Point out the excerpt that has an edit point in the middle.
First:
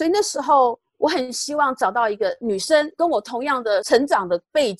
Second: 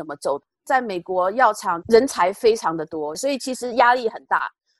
second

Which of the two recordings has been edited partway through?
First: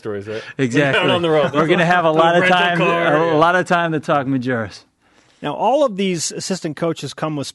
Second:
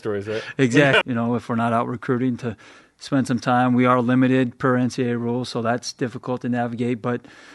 second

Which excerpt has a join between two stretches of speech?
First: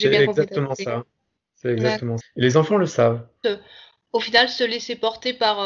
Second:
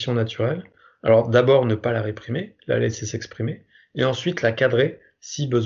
first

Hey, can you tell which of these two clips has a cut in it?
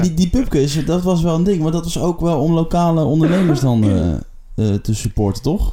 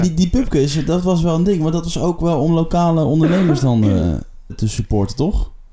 second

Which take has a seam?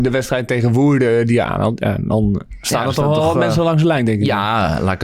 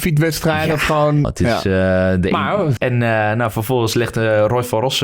second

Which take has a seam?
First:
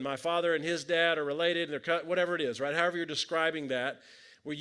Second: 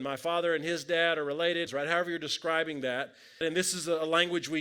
second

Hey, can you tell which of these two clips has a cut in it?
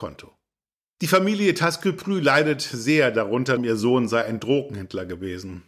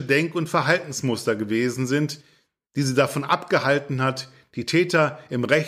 first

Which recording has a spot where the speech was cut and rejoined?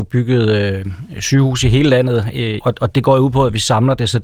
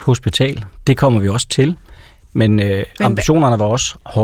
first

